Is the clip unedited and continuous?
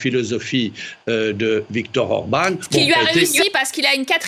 yes; 0 cuts

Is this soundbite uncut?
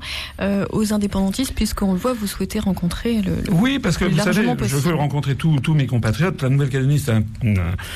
yes; 0 cuts

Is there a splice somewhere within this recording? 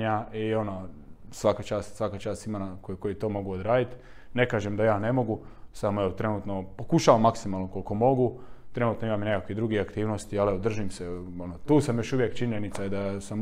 no; 0 cuts

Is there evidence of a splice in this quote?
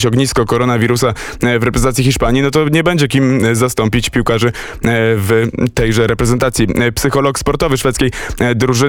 yes; 1 cut; at 6.9 s

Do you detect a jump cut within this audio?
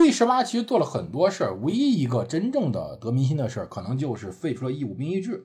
no; 0 cuts

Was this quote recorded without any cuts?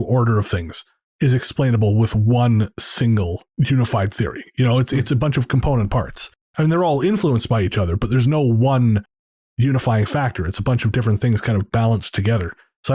yes; 0 cuts

